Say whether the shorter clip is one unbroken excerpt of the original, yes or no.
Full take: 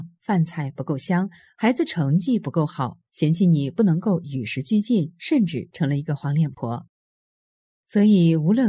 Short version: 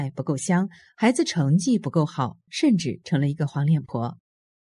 no